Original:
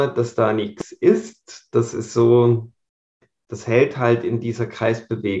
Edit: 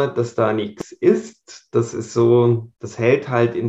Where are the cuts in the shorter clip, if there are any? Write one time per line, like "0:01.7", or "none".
0:02.7

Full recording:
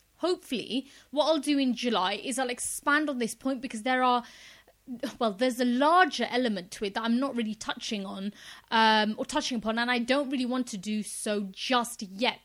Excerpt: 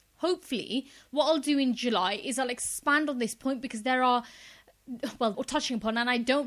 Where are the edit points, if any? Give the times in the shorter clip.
0:05.3

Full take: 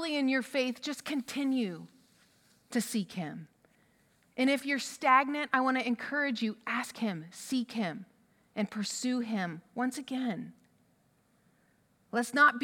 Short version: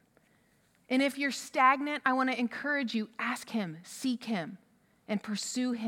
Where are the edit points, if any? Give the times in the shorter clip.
none

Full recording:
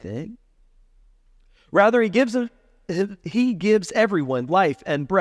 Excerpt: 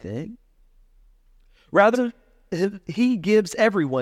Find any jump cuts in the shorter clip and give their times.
0:01.9

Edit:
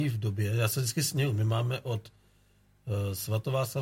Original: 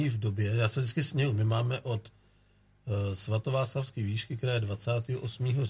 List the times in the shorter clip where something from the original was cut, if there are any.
none

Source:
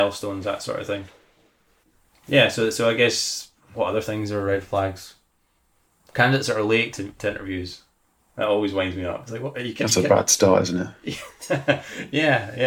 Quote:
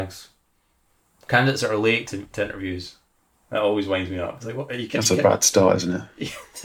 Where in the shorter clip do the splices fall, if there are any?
none

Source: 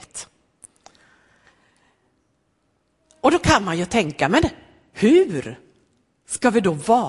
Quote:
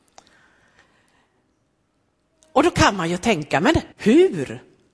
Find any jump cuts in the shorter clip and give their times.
0:03.9

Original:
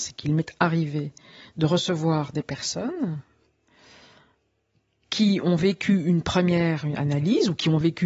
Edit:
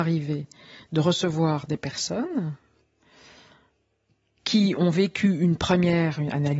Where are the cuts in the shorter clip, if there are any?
none

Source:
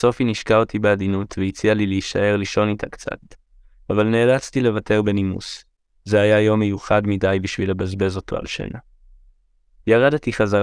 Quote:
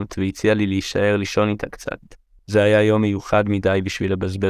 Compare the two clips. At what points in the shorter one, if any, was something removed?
0:02.4

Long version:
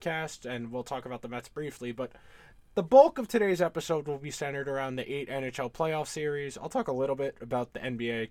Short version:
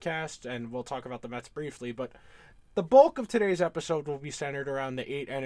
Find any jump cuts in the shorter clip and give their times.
none

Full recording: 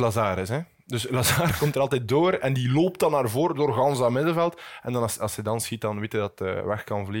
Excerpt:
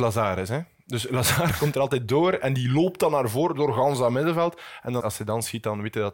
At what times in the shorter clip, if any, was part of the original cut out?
0:05.0

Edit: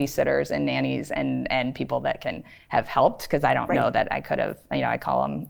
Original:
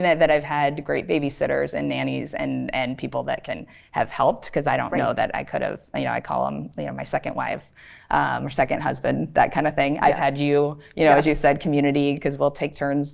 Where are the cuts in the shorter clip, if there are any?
none

